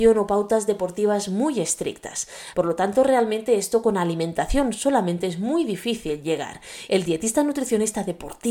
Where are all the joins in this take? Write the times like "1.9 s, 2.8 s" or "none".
2.5 s, 6.9 s